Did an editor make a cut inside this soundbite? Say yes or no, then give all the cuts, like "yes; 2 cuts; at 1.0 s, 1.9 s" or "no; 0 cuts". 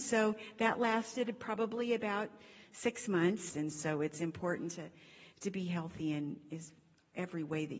yes; 1 cut; at 3.5 s